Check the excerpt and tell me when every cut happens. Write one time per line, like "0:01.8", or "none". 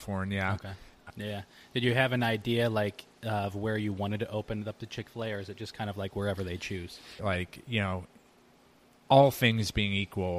0:01.1
0:07.2